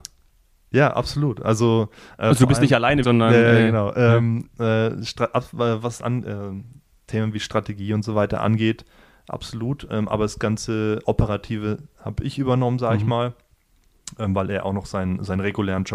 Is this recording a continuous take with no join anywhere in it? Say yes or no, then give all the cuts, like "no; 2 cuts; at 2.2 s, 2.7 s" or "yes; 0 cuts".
no; 1 cut; at 3.0 s